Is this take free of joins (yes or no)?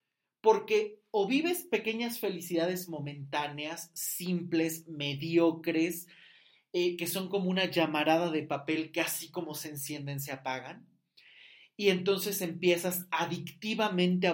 yes